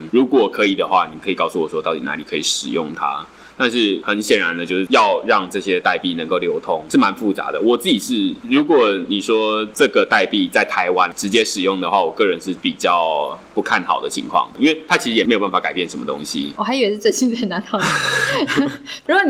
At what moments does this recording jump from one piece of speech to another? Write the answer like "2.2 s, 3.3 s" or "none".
16.6 s